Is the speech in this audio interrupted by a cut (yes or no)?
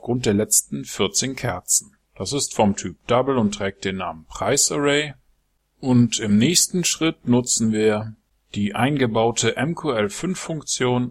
yes